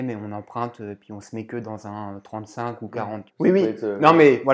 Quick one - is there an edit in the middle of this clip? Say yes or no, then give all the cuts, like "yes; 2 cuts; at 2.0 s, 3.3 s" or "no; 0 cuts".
yes; 1 cut; at 3.3 s